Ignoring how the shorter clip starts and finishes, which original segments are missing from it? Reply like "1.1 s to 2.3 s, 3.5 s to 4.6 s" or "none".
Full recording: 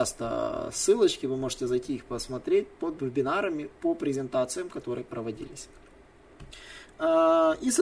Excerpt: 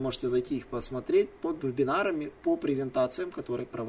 none